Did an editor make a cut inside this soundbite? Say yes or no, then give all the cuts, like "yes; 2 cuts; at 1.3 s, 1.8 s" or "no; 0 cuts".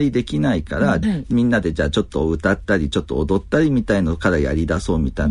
yes; 1 cut; at 1.0 s